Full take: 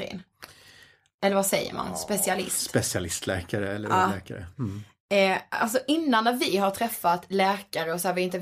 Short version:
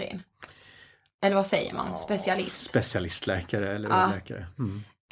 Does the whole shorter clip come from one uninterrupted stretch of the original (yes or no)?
yes